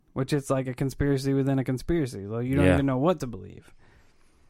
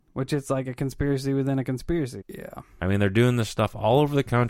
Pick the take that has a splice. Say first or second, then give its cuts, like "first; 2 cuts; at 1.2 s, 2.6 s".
second; 1 cut; at 2.2 s